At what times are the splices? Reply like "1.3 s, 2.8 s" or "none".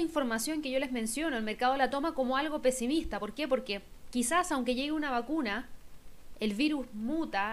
none

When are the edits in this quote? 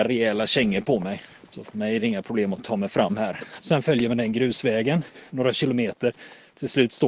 1.5 s, 3.6 s

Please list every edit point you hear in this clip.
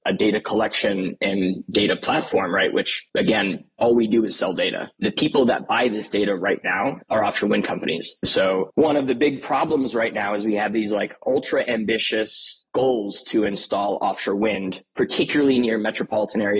7.0 s

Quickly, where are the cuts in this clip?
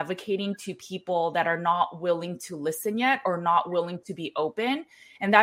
none

